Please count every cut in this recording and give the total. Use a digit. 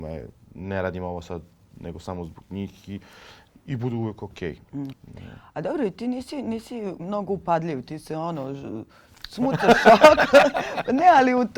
1